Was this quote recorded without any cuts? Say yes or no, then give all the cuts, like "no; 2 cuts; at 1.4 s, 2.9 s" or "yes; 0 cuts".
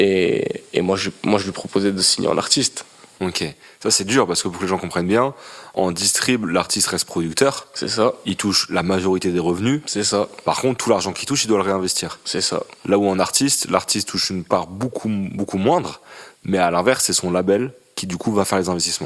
yes; 0 cuts